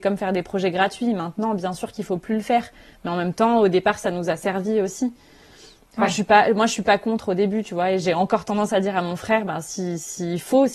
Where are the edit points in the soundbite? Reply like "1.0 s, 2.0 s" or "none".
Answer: none

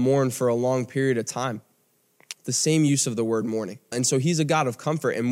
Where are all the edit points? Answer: 2.3 s, 3.9 s

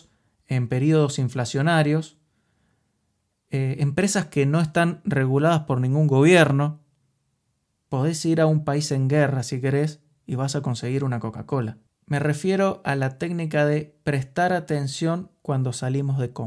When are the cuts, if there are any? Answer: 7.8 s, 11.9 s

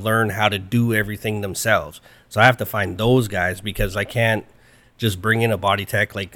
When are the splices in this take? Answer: none

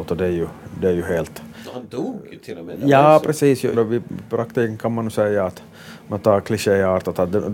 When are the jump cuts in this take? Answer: 3.7 s

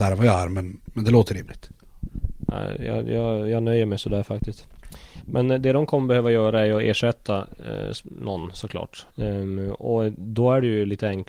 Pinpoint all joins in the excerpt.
9.1 s

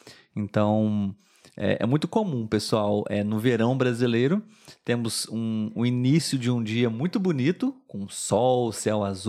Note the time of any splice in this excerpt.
none

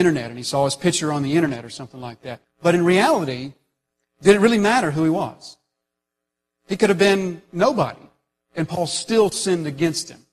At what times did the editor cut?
2.4 s

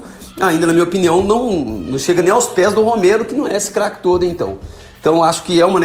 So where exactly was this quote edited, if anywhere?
none

